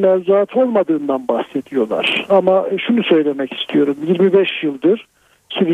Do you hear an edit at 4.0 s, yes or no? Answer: no